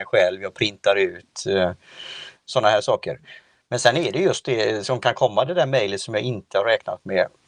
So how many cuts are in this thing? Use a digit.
0